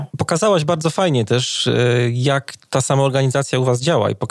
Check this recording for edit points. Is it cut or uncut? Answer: uncut